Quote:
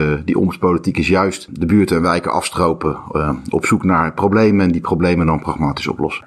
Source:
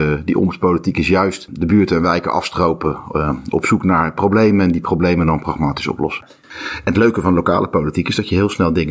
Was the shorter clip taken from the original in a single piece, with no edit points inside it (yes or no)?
yes